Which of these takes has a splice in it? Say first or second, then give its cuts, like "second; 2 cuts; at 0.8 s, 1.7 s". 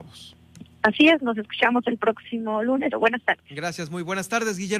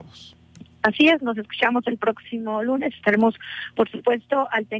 first; 1 cut; at 2.9 s